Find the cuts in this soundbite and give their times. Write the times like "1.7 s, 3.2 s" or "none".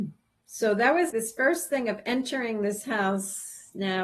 1.1 s

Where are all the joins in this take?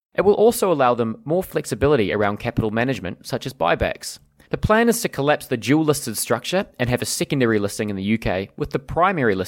4.4 s

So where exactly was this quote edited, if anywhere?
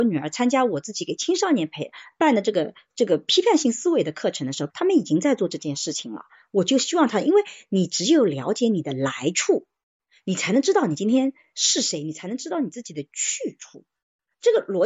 4.7 s

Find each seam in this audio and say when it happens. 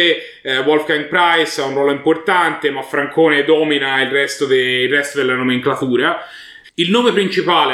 6.6 s

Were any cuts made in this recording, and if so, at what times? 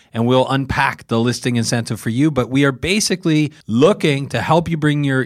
3.6 s

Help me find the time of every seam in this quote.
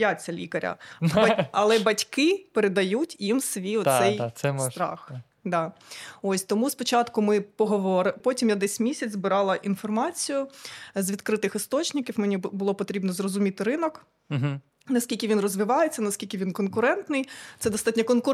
8.2 s

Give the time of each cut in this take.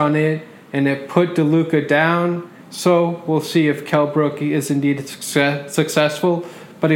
2.6 s

